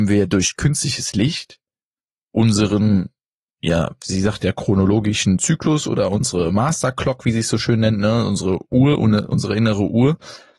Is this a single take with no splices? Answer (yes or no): yes